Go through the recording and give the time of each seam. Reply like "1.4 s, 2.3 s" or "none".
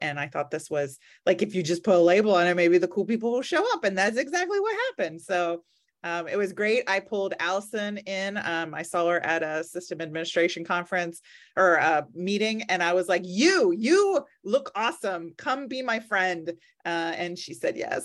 none